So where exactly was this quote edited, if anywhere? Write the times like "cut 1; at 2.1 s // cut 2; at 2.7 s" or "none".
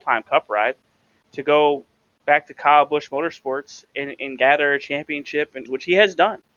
cut 1; at 5.7 s